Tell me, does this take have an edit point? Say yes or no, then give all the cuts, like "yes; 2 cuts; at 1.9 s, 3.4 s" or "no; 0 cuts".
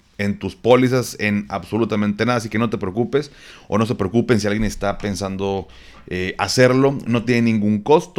no; 0 cuts